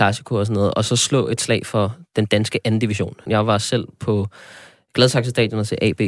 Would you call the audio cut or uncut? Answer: cut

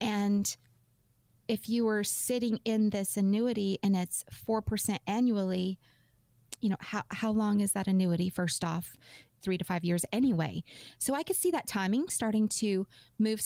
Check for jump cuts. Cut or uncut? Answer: cut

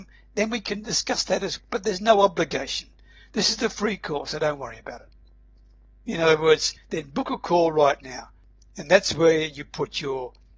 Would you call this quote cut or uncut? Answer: cut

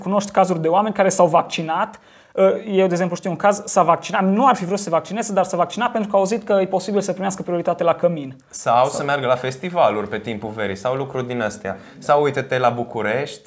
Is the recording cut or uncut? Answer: uncut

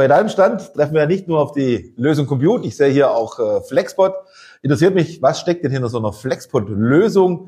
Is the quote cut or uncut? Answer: uncut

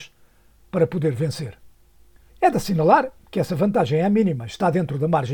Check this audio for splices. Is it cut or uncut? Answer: cut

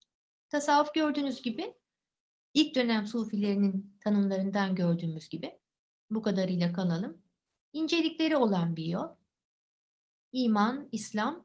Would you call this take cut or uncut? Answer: uncut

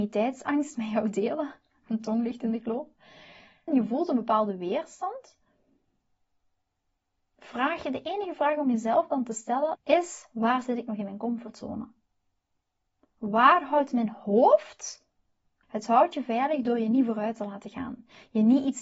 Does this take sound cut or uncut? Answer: cut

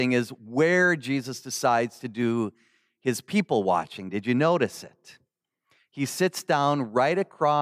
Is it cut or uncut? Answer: uncut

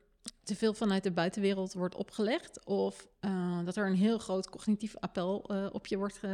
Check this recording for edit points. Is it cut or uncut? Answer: uncut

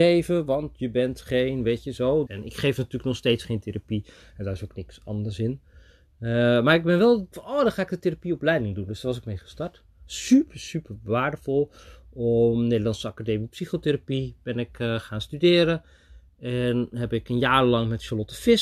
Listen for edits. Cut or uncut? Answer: cut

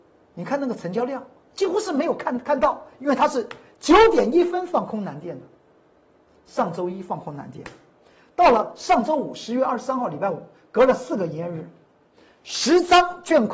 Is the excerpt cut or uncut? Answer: uncut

